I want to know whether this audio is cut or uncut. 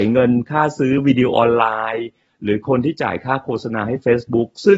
cut